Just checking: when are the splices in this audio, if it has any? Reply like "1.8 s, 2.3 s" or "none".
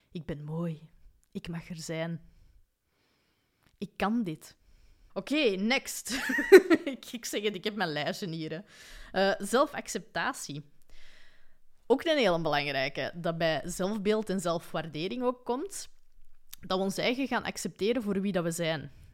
5.1 s